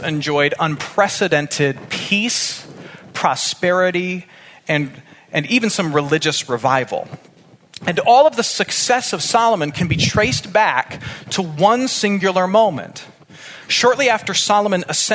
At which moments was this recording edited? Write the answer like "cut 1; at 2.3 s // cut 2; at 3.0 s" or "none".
none